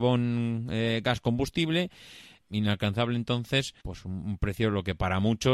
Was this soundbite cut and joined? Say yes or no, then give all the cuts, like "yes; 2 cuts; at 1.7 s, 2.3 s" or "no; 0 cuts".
yes; 2 cuts; at 2.4 s, 3.8 s